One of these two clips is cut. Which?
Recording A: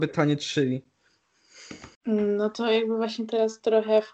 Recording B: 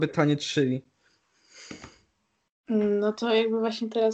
A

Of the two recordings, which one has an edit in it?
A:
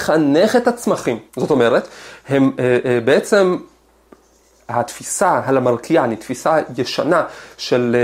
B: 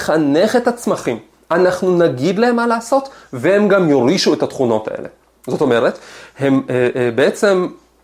A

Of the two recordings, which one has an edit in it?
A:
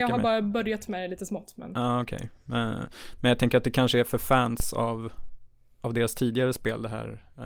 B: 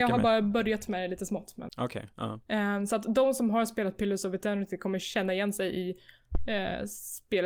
B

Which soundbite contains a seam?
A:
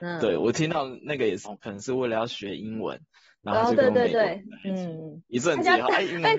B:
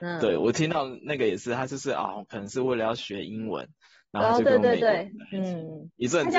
A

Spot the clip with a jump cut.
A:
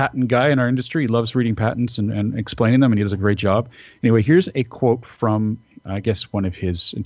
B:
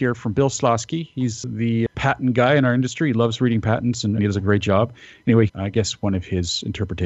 B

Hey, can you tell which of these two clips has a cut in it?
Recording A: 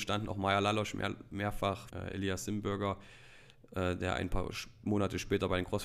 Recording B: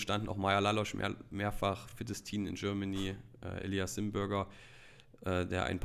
A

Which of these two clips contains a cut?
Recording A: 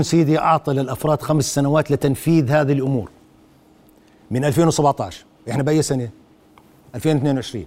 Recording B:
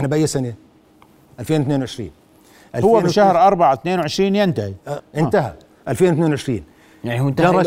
B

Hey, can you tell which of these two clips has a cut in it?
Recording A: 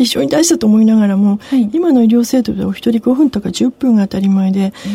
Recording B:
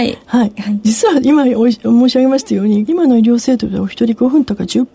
B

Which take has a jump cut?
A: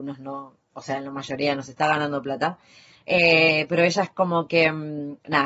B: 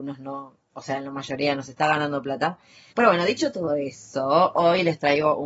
B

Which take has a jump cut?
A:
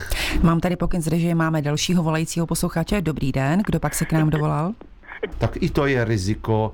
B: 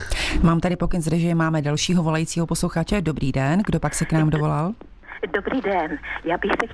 A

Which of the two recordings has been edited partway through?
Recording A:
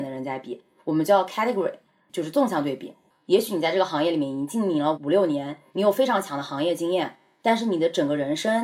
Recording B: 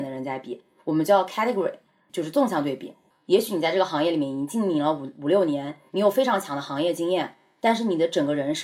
A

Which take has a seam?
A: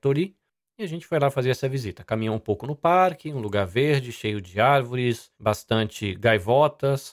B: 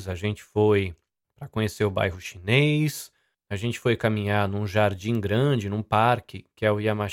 A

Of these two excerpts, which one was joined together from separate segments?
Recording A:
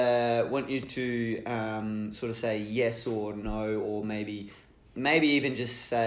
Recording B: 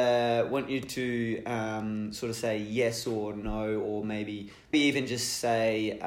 B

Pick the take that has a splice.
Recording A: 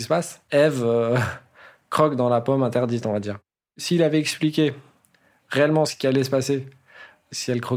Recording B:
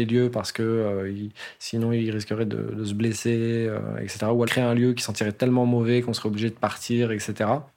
B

